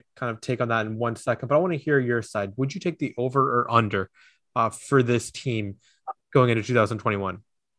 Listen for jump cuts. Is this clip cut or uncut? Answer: uncut